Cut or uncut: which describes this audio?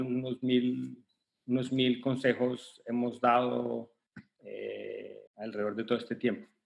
cut